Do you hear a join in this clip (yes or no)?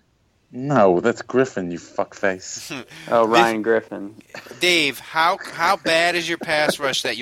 no